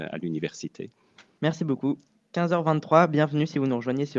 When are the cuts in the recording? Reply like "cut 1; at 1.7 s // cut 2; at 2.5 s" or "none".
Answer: none